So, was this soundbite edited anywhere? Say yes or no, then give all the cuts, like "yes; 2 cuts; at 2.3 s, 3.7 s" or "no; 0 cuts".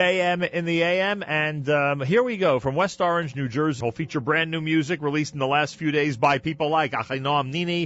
yes; 1 cut; at 3.8 s